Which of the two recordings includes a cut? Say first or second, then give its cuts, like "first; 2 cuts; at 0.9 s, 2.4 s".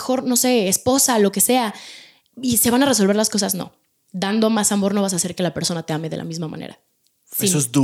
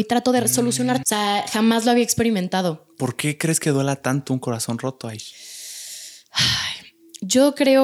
second; 1 cut; at 1.0 s